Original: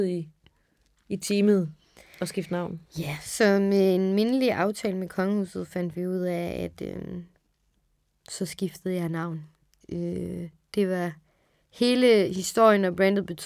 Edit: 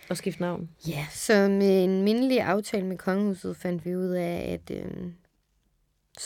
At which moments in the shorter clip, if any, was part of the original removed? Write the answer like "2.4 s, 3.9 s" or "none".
none

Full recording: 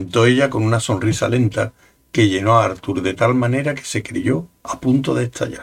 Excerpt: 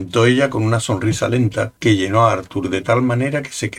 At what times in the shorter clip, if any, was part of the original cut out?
1.8 s

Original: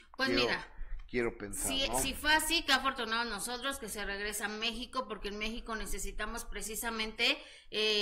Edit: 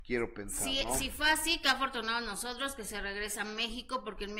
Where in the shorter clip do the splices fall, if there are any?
none

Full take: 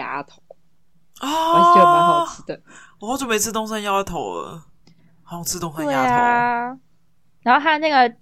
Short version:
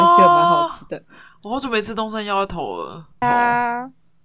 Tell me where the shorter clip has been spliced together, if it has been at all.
3.2 s

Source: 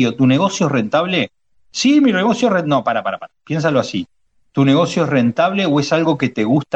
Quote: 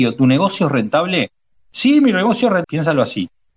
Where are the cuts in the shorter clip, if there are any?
2.6 s

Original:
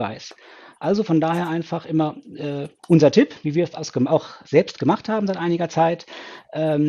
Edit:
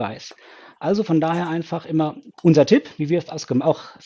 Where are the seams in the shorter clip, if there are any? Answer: 2.3 s

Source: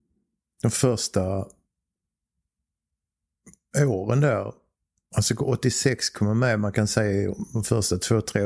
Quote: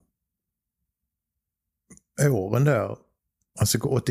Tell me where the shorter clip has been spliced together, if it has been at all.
none

